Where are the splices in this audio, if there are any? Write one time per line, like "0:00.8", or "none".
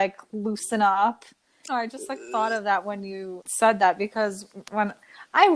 0:01.7
0:03.4

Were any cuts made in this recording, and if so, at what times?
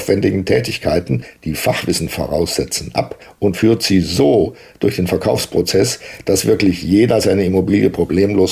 none

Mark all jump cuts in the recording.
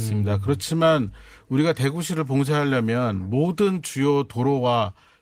none

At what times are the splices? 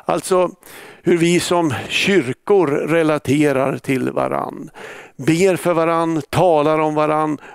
none

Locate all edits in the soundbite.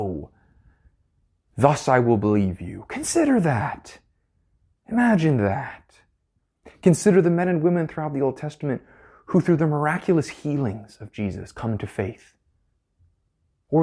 none

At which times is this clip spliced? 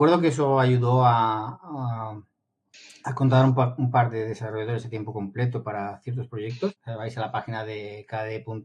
0:06.8

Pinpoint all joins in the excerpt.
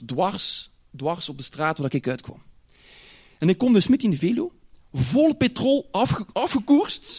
none

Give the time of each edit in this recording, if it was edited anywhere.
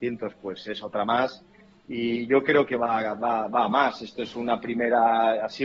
none

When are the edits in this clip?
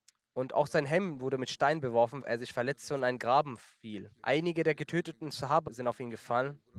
0:02.2
0:04.2
0:05.7

